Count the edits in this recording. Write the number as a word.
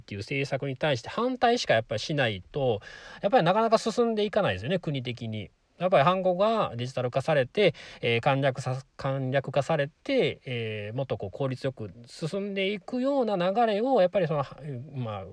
zero